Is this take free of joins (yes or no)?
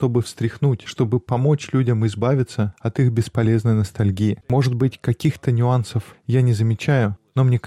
no